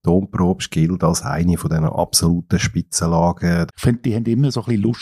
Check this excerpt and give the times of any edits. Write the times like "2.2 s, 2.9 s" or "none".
3.7 s